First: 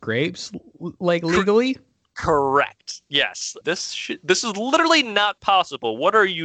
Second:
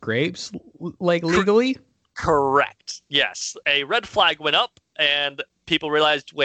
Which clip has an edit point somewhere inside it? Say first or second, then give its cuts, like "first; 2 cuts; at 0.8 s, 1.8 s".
first; 1 cut; at 3.6 s